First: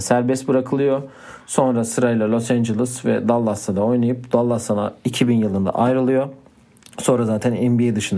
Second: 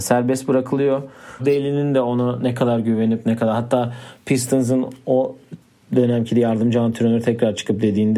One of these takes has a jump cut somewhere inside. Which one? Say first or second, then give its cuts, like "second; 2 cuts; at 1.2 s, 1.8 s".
second; 1 cut; at 1.4 s